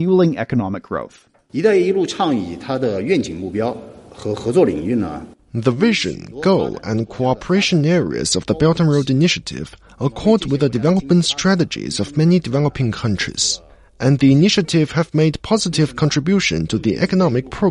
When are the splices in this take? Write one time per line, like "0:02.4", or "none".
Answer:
none